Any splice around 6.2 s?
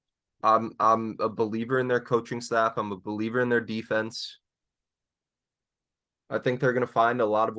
no; 0 cuts

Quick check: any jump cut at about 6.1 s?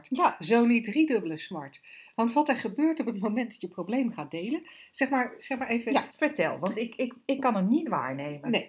yes; 1 cut; at 6.1 s

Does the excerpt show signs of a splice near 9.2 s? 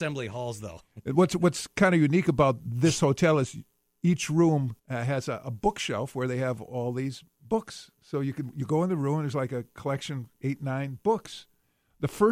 no; 1 cut; at 4.8 s

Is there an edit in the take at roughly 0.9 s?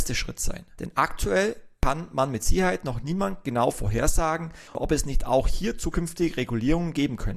no; 1 cut; at 4.7 s

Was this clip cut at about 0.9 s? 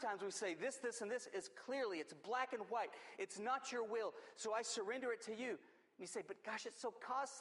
no; 0 cuts

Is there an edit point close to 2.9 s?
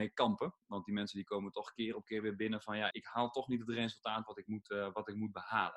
yes; 1 cut; at 2.9 s

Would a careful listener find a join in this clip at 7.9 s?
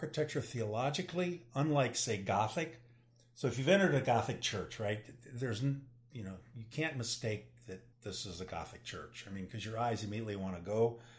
yes; 1 cut; at 7.9 s

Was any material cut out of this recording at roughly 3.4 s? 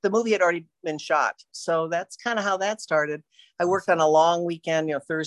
no; 1 cut; at 1.5 s

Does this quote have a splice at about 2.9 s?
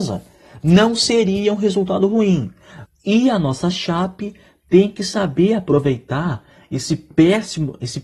yes; 1 cut; at 2.9 s

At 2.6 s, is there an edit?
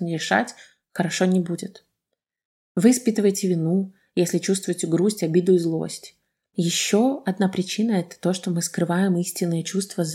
no; 1 cut; at 6.5 s

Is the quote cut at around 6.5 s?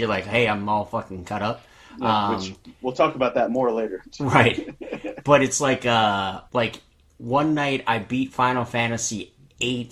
yes; 1 cut; at 6.5 s

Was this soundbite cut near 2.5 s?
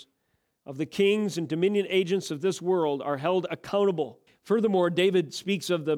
no; 1 cut; at 4.3 s

